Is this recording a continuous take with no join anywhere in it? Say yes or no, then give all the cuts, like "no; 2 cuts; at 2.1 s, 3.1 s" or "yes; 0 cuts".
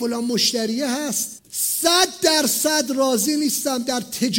no; 1 cut; at 1.4 s